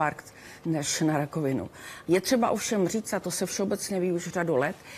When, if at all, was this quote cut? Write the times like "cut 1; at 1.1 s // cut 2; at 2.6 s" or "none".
cut 1; at 2.1 s